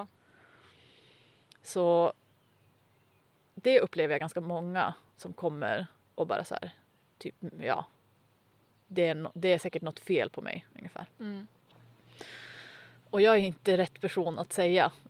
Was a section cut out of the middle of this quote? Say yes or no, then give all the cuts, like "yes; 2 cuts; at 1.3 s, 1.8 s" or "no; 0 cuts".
no; 0 cuts